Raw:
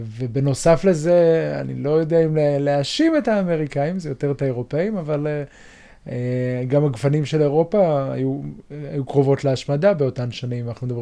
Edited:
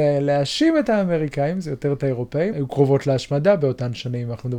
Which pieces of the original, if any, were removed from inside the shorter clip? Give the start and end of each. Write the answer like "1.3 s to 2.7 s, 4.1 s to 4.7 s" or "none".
4.9 s to 8.9 s